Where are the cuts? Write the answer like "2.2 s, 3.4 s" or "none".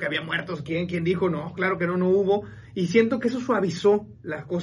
none